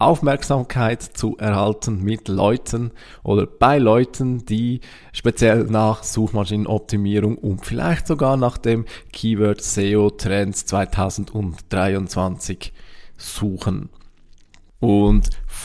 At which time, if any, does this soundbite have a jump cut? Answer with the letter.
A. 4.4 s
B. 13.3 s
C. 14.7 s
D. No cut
C